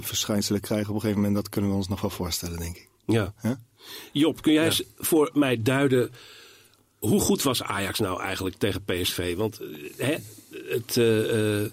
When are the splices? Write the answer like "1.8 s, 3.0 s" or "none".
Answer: none